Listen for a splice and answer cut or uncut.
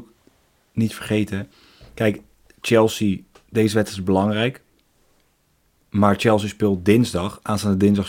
uncut